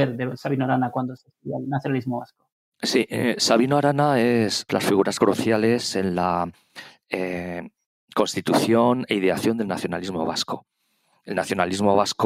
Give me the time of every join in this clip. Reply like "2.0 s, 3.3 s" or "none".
4.7 s